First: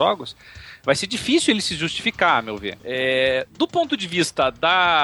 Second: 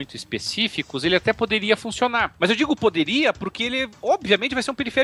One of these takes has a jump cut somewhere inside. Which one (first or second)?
first